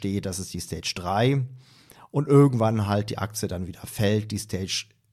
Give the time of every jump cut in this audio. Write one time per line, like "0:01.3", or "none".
none